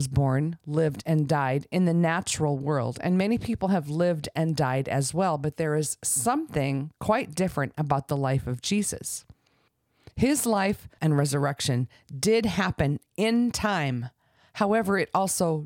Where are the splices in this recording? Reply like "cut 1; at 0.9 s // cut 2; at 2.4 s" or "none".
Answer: cut 1; at 11.0 s